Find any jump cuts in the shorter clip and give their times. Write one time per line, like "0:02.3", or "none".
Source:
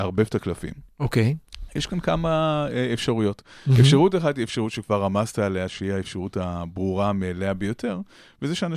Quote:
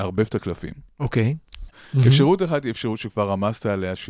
0:01.7